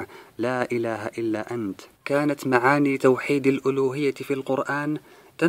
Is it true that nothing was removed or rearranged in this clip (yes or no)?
no